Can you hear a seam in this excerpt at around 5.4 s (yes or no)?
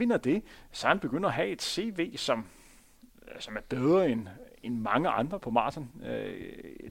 yes